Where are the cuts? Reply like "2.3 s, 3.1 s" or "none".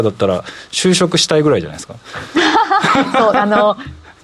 none